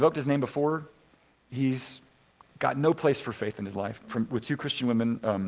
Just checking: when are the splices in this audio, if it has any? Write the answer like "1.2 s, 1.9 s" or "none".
4.0 s